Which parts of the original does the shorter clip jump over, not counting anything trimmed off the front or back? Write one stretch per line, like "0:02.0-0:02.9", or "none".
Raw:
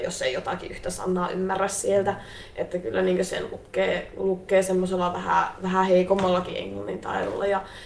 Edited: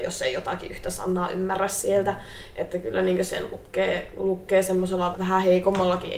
0:05.1-0:05.6